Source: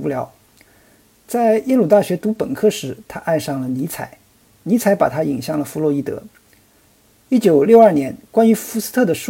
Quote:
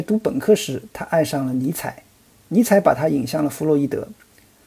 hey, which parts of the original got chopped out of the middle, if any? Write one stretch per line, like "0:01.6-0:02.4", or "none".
none